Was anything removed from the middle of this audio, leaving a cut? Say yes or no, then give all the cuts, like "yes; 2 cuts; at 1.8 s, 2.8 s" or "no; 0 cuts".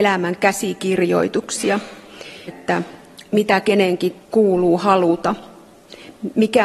yes; 2 cuts; at 2.5 s, 4.2 s